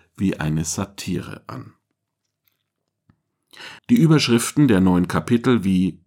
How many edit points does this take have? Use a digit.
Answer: 1